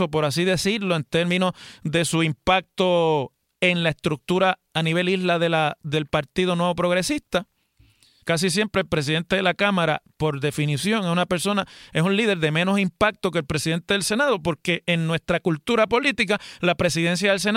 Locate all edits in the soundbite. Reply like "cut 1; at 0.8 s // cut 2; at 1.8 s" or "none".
cut 1; at 8.2 s